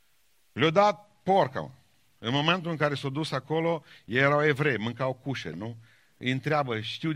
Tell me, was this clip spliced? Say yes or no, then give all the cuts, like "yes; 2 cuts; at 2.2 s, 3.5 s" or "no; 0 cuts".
yes; 1 cut; at 5.5 s